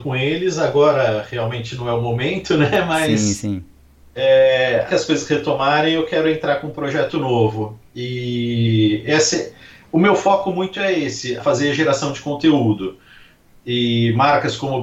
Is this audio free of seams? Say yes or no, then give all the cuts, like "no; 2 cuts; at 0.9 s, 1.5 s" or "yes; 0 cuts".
no; 2 cuts; at 4.9 s, 11.4 s